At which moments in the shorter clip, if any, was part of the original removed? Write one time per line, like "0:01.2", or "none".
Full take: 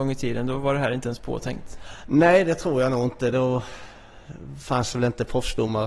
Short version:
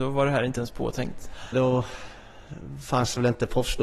0:01.5